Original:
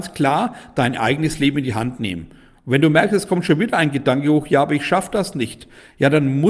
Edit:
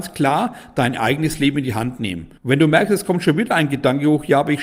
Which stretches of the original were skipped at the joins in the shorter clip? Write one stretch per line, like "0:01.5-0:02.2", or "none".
0:02.4-0:02.6